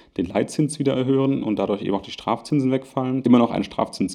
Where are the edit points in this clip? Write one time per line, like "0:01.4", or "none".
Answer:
0:03.2